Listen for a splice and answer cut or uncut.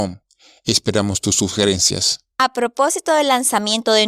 uncut